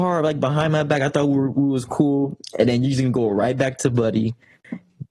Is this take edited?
no; 0 cuts

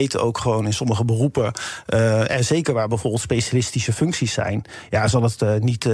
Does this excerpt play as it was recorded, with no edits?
yes; 0 cuts

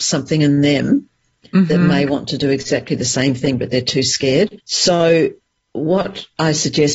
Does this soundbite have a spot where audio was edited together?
yes; 1 cut; at 4.6 s

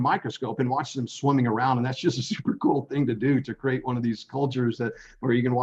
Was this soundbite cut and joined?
no; 0 cuts

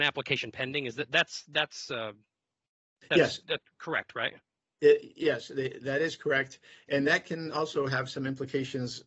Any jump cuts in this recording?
no; 0 cuts

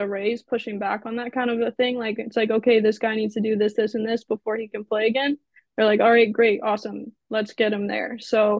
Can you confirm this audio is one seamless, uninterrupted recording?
yes; 0 cuts

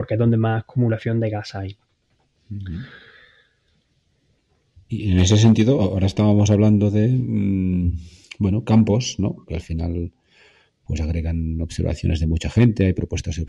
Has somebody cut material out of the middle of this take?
yes; 2 cuts; at 4.9 s, 9.5 s

